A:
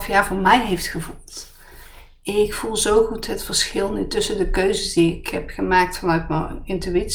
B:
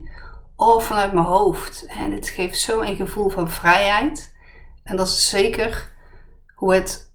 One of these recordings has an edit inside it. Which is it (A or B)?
B